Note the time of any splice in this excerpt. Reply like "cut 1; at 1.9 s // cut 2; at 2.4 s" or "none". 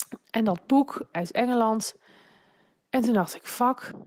cut 1; at 1.1 s